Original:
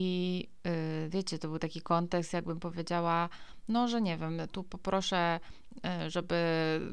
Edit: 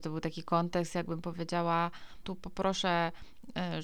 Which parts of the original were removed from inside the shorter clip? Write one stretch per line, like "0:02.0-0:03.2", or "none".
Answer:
0:03.6-0:04.5